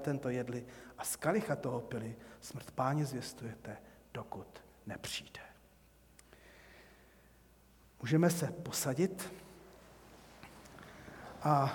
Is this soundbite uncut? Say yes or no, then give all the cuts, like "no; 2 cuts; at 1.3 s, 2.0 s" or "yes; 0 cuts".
yes; 0 cuts